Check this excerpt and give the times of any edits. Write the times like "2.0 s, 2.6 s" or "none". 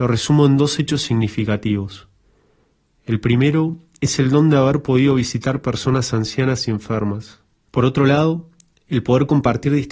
7.7 s